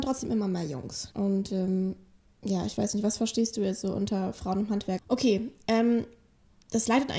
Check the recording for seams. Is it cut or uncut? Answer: cut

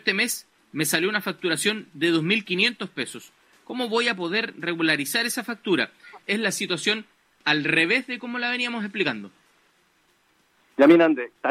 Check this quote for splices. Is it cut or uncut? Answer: cut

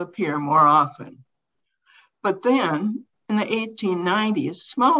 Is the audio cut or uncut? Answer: uncut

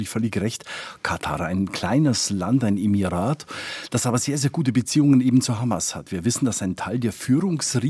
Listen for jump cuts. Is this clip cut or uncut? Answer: uncut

